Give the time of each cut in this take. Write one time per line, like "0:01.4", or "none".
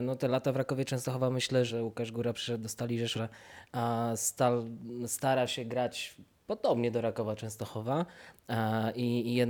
0:01.7
0:03.1